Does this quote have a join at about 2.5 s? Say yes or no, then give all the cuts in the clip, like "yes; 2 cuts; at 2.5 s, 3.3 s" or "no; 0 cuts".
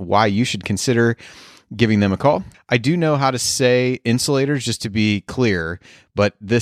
yes; 1 cut; at 2.5 s